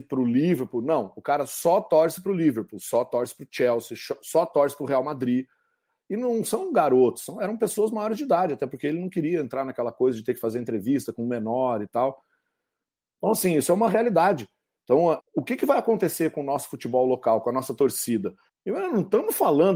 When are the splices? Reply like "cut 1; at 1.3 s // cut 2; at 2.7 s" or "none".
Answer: cut 1; at 15.2 s // cut 2; at 18.5 s